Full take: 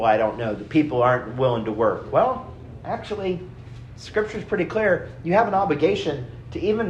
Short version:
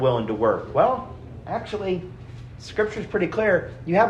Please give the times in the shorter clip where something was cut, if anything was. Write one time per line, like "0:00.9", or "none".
none